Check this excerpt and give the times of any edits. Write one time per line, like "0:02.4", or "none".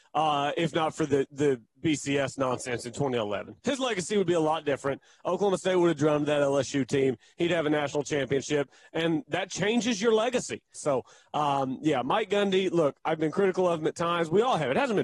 0:10.7